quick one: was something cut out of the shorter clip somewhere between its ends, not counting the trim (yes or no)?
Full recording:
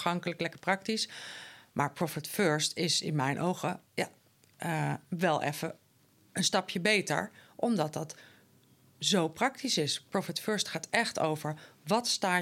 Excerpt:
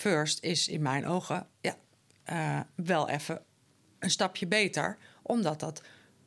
no